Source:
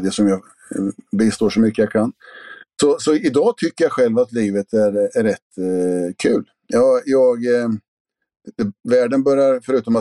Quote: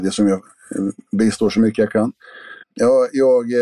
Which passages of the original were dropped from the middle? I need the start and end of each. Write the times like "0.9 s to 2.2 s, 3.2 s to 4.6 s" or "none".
2.6 s to 6.6 s